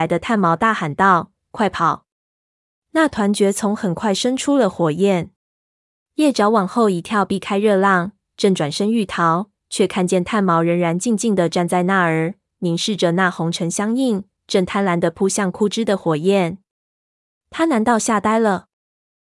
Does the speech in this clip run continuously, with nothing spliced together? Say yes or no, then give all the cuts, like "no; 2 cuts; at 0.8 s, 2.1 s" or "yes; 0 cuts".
yes; 0 cuts